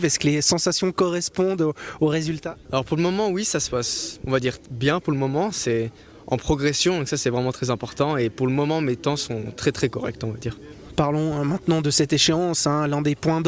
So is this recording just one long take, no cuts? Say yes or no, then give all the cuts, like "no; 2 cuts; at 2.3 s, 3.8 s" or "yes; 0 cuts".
yes; 0 cuts